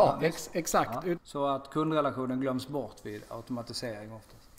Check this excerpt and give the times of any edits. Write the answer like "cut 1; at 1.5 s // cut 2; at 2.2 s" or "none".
cut 1; at 1.2 s